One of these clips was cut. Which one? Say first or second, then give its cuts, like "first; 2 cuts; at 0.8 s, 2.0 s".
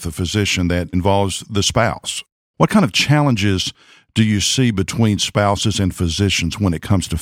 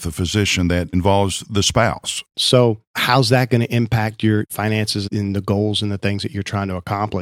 second; 1 cut; at 2.3 s